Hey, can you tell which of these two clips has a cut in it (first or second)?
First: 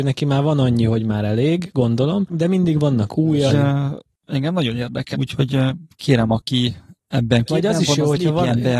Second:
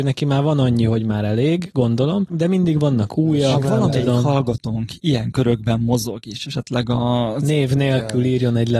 first